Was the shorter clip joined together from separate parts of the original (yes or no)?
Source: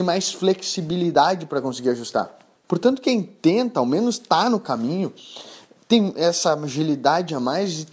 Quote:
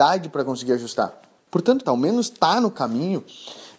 yes